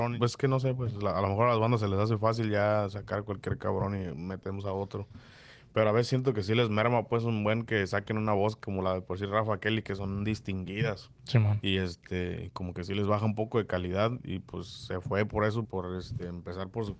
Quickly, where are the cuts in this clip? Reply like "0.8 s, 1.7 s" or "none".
11.6 s, 15.6 s